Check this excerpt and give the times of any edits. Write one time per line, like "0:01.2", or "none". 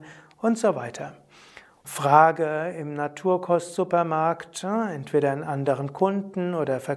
0:01.8